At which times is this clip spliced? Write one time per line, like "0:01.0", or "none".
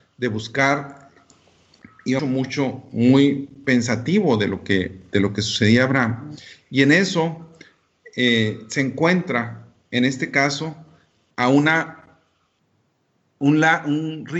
0:02.2